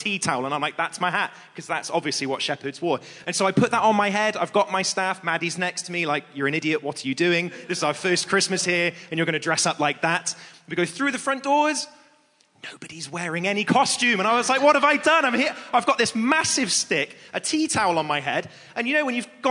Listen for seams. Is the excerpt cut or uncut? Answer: uncut